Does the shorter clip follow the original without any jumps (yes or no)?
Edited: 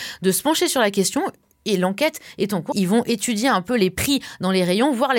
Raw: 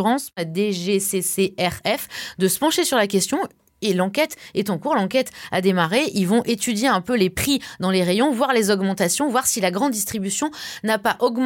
no